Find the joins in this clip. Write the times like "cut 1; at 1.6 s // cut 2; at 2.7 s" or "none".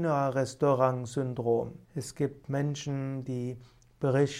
cut 1; at 1.8 s